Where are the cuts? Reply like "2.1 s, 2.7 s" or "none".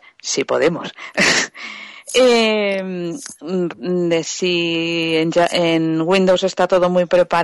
3.7 s